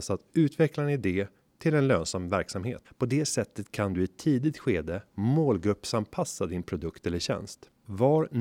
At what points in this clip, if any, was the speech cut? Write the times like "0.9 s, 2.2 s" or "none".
2.8 s